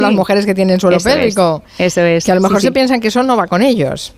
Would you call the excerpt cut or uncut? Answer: uncut